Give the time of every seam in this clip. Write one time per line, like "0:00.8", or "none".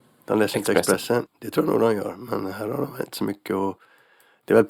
0:01.3